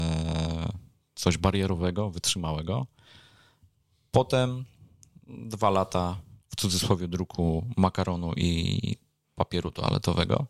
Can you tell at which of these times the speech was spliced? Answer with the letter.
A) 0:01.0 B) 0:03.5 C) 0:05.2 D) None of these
D